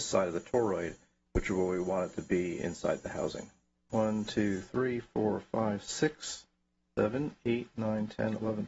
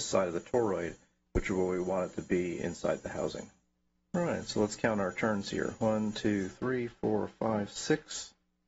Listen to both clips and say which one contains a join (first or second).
first